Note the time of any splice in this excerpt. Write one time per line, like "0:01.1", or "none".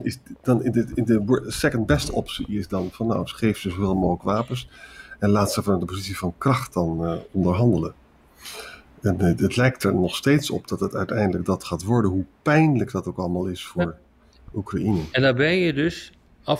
none